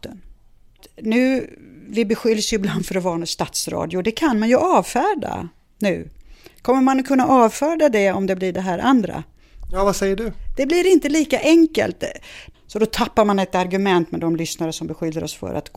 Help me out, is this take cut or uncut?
uncut